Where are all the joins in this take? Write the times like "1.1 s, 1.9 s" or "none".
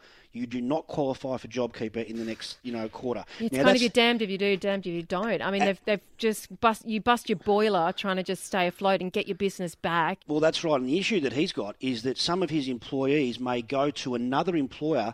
10.2 s